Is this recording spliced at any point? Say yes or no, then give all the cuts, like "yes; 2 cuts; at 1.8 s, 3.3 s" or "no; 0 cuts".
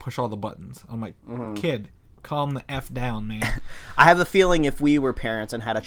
no; 0 cuts